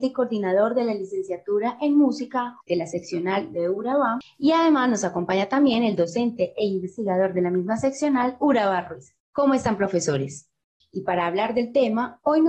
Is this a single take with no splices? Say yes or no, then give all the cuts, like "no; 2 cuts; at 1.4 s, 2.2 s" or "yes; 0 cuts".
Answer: no; 2 cuts; at 2.6 s, 10.8 s